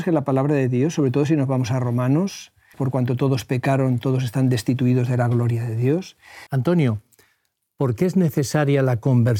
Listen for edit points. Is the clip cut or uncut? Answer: cut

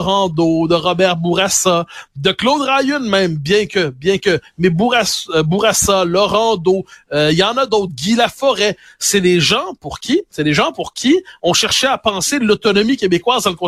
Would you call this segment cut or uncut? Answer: uncut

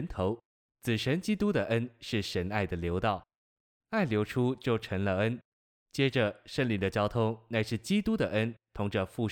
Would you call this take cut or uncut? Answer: uncut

